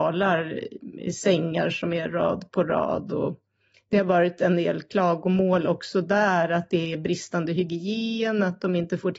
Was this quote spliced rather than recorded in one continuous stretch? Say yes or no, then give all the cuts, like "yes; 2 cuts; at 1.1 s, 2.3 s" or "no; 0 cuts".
no; 0 cuts